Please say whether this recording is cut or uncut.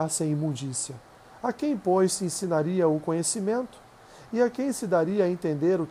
uncut